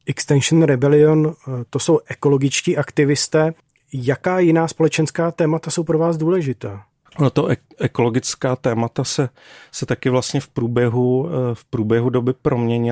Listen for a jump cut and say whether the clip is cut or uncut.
uncut